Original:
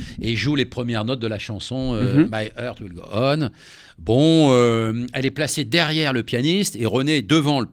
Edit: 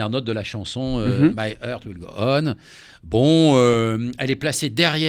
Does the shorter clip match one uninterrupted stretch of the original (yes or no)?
yes